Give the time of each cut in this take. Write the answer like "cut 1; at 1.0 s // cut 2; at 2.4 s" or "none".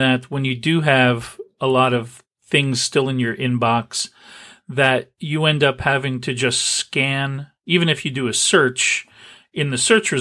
none